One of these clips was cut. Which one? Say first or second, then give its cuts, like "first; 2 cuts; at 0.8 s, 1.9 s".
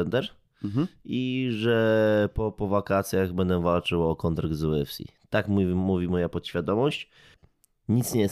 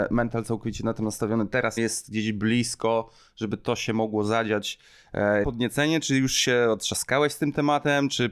second; 2 cuts; at 1.8 s, 5.4 s